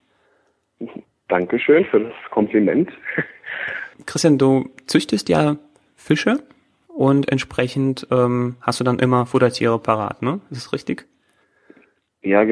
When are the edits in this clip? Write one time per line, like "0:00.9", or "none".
0:08.6